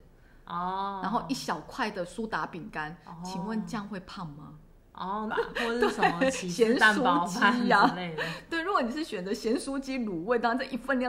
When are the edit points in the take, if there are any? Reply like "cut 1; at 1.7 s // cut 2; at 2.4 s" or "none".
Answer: cut 1; at 5.3 s

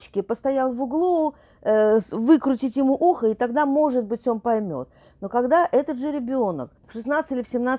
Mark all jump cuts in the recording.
cut 1; at 6.8 s

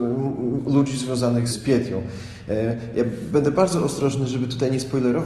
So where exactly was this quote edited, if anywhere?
cut 1; at 1.5 s

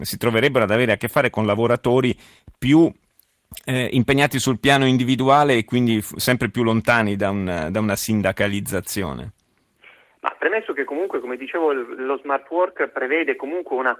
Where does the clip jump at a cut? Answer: none

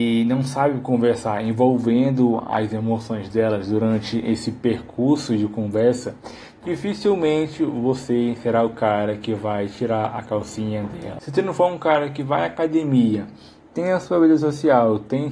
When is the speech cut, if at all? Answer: cut 1; at 11.2 s

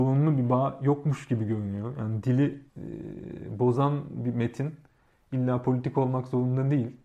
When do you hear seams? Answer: cut 1; at 2.7 s

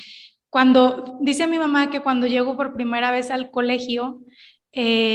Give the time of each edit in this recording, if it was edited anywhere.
none

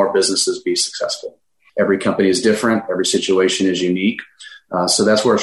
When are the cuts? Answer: cut 1; at 1.7 s

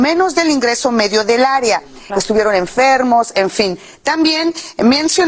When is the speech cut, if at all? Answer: cut 1; at 2.1 s

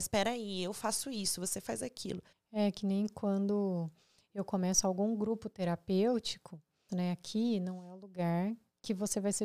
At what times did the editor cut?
cut 1; at 2.3 s // cut 2; at 6.9 s

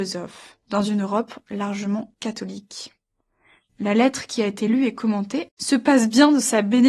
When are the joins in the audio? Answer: cut 1; at 3.7 s // cut 2; at 5.5 s

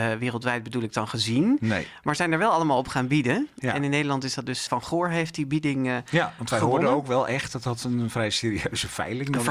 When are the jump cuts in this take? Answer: cut 1; at 4.7 s

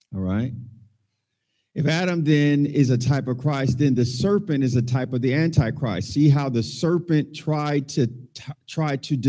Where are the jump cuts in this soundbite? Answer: none

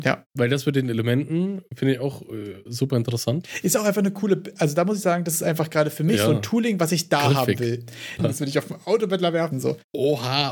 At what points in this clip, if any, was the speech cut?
cut 1; at 8.2 s // cut 2; at 9.5 s

